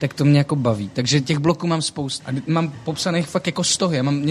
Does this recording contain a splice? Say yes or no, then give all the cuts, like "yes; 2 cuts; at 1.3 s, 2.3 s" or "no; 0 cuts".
yes; 1 cut; at 2.2 s